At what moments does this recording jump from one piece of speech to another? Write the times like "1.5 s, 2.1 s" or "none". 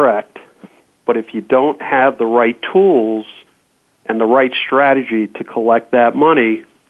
1.0 s